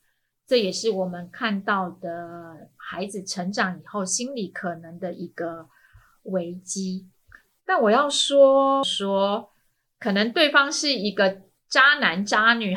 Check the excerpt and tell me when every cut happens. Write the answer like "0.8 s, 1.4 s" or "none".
8.8 s